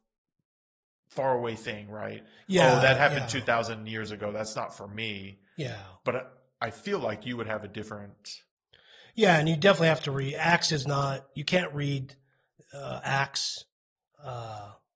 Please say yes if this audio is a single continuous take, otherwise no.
yes